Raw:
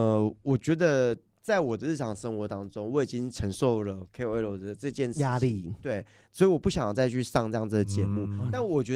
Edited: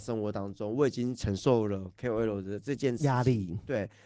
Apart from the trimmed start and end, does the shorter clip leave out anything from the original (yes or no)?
no